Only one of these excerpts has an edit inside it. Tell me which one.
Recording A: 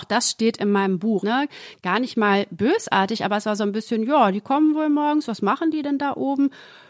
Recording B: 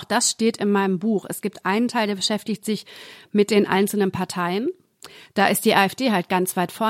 A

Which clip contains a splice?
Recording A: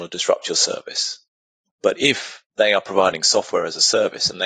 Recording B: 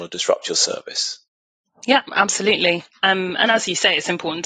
A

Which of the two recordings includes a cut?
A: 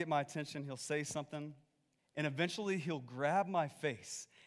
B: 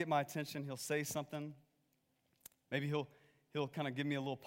A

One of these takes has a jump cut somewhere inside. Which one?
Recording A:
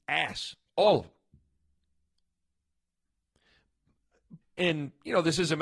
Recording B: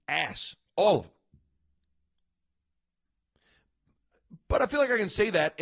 A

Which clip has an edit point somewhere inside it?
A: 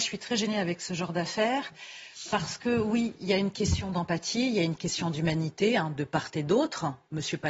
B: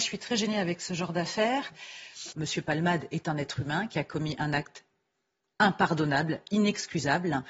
B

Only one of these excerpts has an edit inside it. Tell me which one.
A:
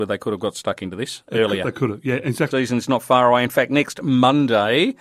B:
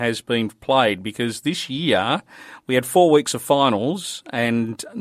A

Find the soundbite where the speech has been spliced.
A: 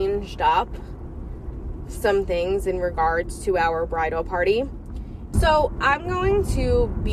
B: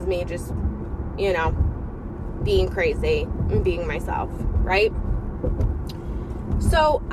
A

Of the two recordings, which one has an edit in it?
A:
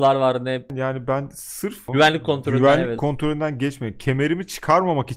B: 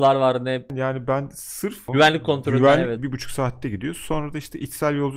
B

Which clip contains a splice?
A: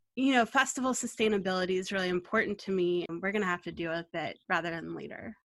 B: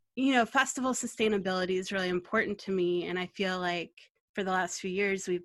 A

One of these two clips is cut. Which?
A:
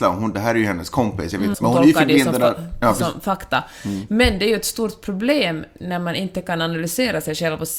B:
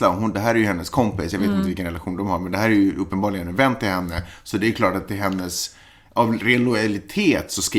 A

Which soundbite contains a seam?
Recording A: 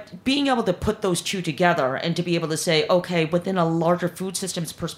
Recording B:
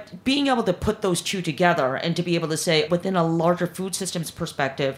B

